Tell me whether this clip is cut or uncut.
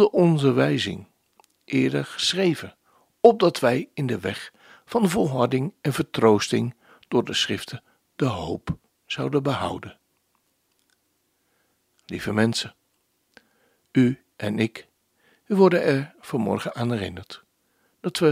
uncut